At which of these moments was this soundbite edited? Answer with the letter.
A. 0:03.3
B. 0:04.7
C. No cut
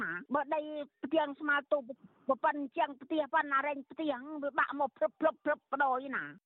A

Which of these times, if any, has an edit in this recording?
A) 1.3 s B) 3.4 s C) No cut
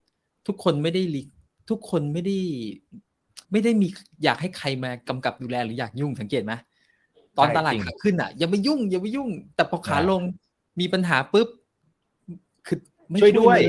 B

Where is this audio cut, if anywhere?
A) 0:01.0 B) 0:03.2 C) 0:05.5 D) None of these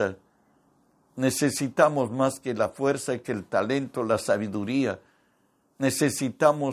D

